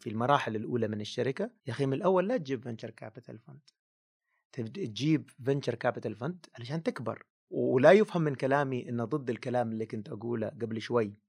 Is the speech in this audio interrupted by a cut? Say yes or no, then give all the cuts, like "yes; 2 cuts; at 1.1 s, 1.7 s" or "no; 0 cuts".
yes; 1 cut; at 1.6 s